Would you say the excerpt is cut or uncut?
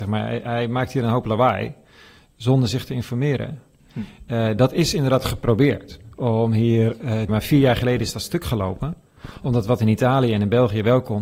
cut